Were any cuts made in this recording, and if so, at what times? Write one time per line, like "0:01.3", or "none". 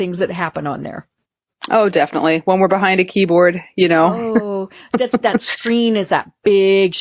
none